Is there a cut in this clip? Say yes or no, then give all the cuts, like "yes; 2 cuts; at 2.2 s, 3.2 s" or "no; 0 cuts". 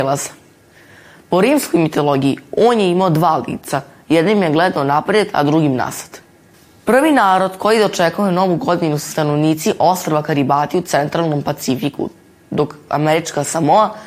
no; 0 cuts